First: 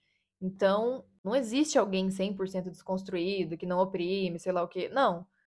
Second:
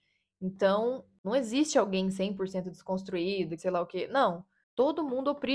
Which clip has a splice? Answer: second; 1 cut; at 3.6 s

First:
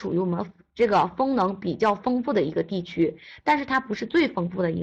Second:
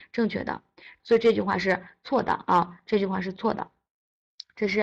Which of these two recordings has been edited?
second; 1 cut; at 1.0 s

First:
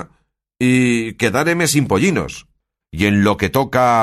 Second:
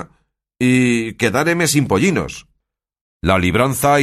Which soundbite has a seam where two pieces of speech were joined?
first; 1 cut; at 2.8 s

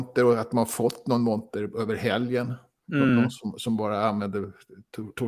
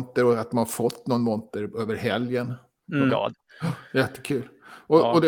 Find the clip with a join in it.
second; 1 cut; at 3.1 s

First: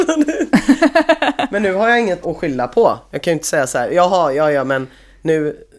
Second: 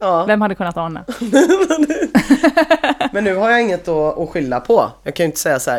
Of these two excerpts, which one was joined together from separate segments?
first; 1 cut; at 2.2 s

